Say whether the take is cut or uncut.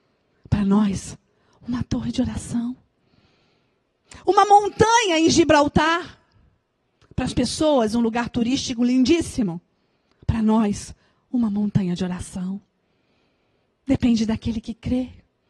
uncut